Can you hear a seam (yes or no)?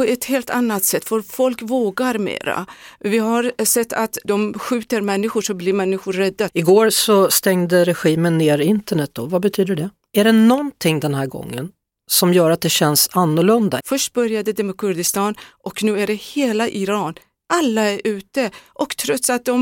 yes